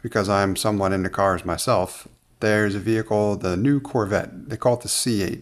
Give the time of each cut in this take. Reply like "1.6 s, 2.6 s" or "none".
2.3 s